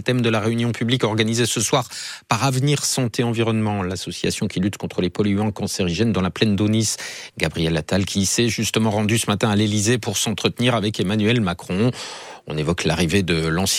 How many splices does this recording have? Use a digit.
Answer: 1